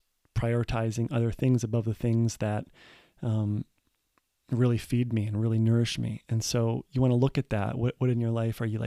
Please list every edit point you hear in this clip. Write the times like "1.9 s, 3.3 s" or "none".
none